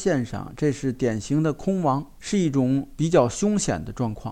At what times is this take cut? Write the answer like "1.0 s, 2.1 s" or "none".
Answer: 2.2 s